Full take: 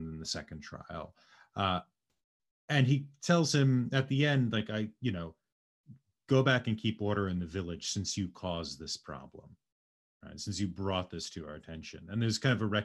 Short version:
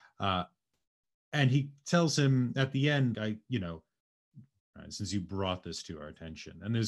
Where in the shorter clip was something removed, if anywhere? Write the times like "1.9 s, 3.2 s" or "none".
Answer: 3.1 s, 4.6 s